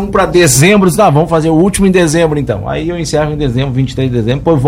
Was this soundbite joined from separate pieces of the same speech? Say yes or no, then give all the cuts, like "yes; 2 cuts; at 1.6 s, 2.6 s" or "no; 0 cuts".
no; 0 cuts